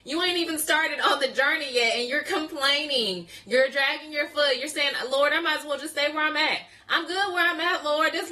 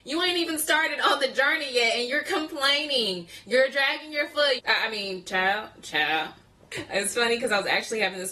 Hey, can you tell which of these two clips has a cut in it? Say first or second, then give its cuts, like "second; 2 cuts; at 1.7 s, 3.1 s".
second; 1 cut; at 4.6 s